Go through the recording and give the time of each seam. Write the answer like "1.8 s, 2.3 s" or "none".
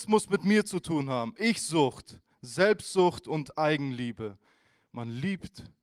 2.3 s